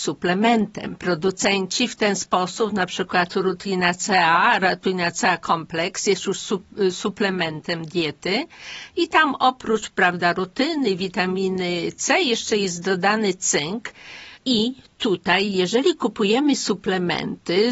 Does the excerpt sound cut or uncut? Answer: cut